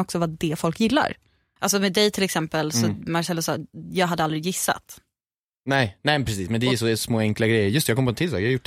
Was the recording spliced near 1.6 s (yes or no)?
yes